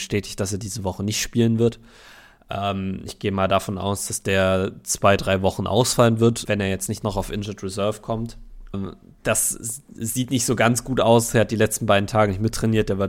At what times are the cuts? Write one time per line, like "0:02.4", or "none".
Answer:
0:06.4
0:08.7